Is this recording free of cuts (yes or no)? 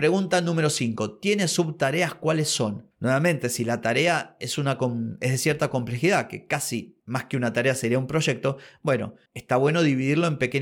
yes